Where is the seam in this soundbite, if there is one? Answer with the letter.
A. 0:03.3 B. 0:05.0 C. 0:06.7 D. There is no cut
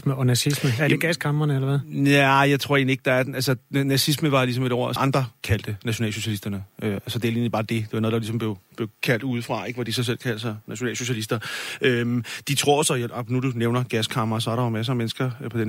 B